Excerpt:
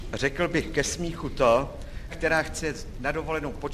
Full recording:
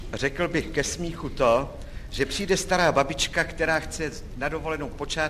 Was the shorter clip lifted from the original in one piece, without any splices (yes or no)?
no